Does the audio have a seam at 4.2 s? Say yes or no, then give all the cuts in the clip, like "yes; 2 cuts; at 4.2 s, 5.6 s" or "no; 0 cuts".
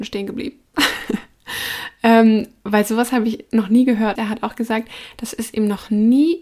yes; 1 cut; at 4.2 s